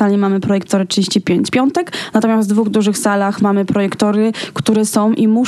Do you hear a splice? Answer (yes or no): yes